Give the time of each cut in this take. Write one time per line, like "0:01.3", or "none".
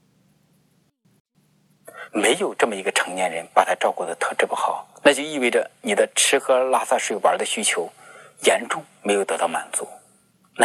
0:02.1